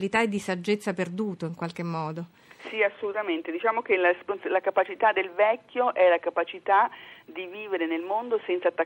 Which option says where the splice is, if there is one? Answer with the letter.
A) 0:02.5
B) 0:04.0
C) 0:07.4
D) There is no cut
D